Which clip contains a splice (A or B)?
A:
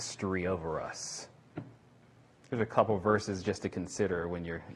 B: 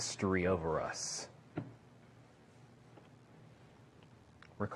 A